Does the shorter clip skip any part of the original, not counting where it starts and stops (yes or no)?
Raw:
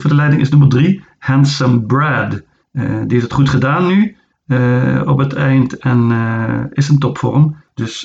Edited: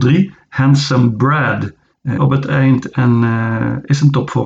yes